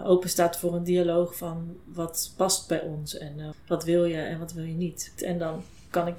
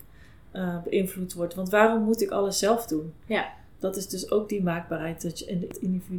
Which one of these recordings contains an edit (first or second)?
first